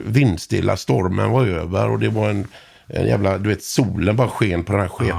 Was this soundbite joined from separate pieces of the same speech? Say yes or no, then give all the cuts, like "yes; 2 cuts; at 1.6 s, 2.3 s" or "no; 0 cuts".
no; 0 cuts